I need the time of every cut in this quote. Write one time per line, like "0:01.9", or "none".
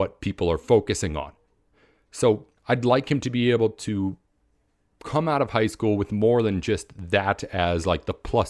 0:02.6